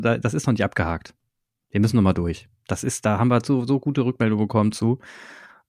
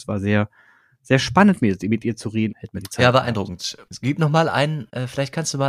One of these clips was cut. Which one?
second; 2 cuts; at 2.5 s, 3.9 s

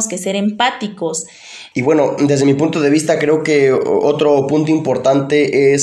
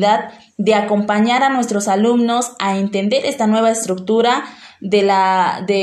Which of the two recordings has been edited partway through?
first; 1 cut; at 1.7 s

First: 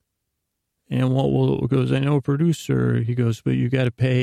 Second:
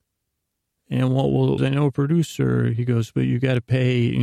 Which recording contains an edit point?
second; 1 cut; at 1.6 s

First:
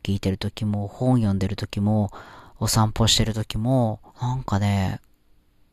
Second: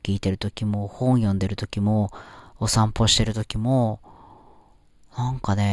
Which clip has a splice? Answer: first; 1 cut; at 4.1 s

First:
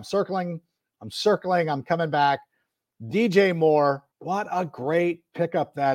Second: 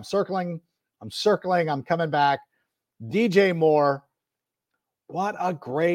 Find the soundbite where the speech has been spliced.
first; 1 cut; at 4.1 s

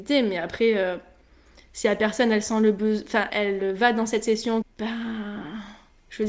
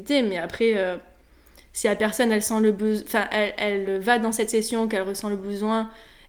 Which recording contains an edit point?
first; 2 cuts; at 3.3 s, 4.6 s

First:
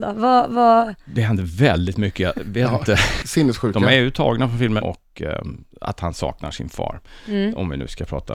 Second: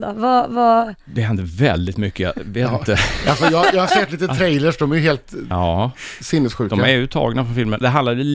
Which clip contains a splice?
first; 2 cuts; at 3.2 s, 4.8 s

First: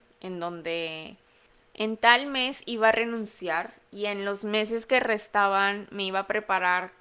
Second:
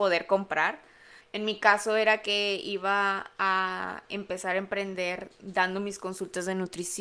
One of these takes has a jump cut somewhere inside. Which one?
second; 1 cut; at 1.2 s

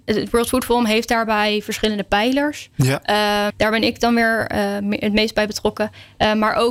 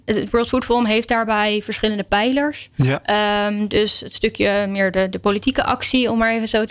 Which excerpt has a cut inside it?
first; 1 cut; at 3.5 s

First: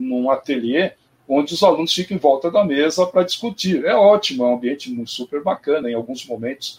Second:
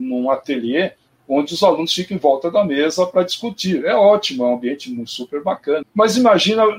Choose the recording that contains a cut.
second; 1 cut; at 5.8 s

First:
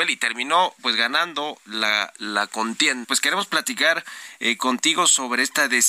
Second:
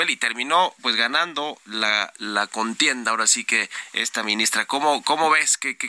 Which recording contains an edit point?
first; 1 cut; at 3.0 s

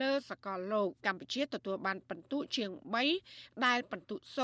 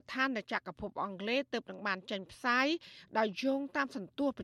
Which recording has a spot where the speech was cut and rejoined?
first; 1 cut; at 1.0 s

